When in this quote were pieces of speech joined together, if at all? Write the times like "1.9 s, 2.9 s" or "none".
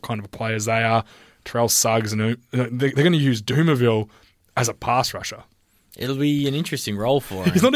none